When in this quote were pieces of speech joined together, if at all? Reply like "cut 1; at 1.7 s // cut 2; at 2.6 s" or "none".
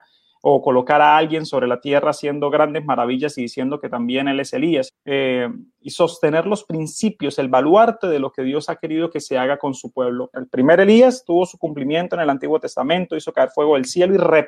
cut 1; at 4.9 s // cut 2; at 10.3 s